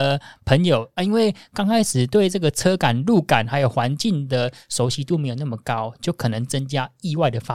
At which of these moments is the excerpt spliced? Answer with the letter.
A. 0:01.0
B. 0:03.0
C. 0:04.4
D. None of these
A